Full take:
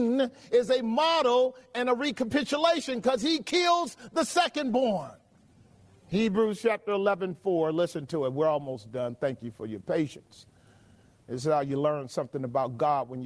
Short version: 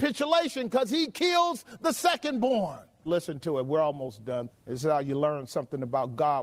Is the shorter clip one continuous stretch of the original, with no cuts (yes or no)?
no